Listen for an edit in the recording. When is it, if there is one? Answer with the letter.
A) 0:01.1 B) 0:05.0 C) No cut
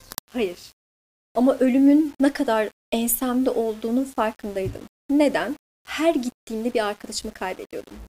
A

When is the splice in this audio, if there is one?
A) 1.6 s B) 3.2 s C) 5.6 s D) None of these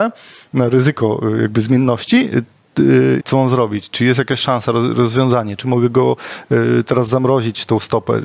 B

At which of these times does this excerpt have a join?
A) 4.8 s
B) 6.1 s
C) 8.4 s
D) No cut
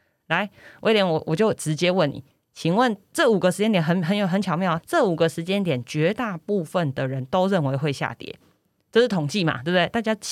A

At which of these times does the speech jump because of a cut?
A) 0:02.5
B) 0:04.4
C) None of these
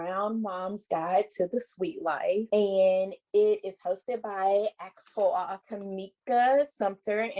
C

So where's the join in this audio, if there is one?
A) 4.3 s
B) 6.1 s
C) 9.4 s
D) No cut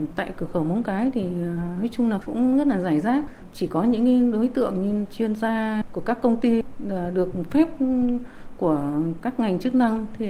D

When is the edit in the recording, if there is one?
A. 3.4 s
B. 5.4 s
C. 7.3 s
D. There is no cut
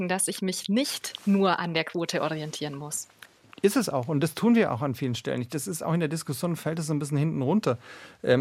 D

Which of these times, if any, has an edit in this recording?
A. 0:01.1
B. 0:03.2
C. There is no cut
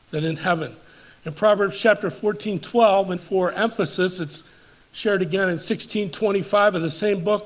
B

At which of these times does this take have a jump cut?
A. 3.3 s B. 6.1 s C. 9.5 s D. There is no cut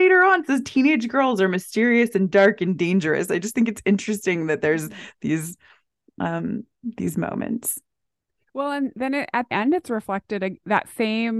C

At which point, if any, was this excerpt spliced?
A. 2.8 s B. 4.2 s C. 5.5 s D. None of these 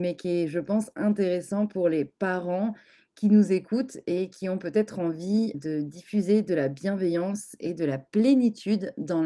C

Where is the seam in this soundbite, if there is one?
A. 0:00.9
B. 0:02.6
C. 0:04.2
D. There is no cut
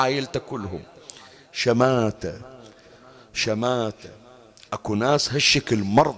D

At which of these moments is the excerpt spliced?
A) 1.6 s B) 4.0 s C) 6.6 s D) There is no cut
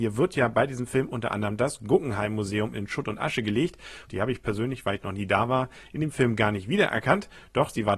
B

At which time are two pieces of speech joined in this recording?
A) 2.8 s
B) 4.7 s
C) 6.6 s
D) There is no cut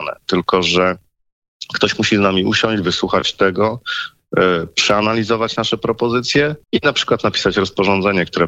C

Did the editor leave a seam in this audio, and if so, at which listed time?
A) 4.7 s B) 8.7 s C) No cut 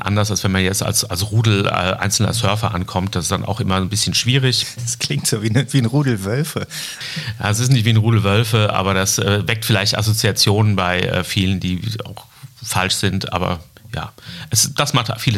C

